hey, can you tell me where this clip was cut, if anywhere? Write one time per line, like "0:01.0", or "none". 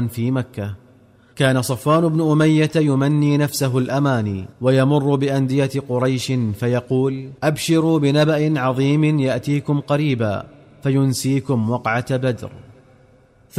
0:04.5
0:07.4